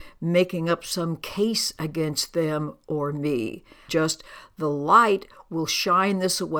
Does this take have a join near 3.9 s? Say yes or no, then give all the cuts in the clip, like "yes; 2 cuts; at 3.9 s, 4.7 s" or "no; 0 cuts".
yes; 1 cut; at 3.9 s